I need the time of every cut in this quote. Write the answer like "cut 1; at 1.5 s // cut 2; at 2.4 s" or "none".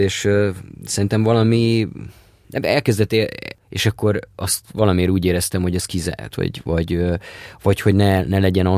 cut 1; at 3.5 s // cut 2; at 6.3 s